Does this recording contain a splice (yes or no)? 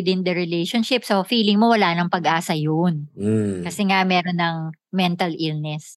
no